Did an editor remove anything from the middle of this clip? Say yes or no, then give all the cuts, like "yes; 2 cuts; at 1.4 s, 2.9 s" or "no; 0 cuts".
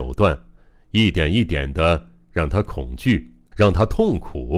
yes; 1 cut; at 3.5 s